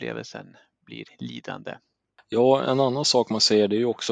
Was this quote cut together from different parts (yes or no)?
no